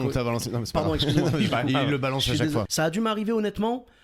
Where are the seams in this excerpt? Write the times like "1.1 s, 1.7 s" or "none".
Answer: 1.5 s, 2.7 s